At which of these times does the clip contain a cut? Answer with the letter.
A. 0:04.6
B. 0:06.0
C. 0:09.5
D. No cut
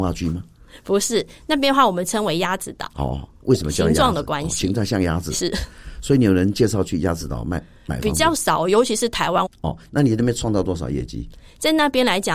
C